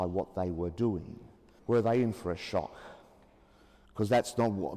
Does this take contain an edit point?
yes; 1 cut; at 1.6 s

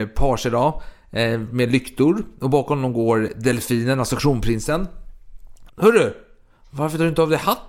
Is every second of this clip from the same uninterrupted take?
no; 1 cut; at 5.7 s

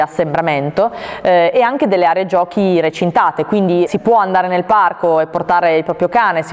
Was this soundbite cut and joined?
yes; 1 cut; at 3.9 s

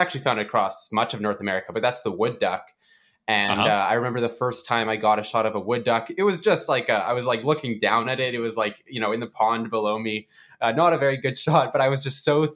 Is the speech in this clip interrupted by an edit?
no; 0 cuts

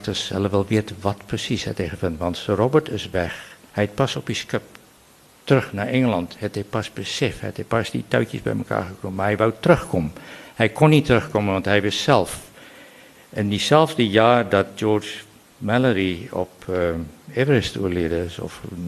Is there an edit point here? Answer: no; 0 cuts

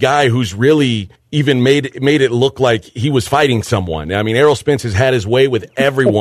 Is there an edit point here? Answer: no; 0 cuts

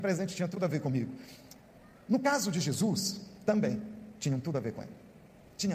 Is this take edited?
yes; 1 cut; at 3.5 s

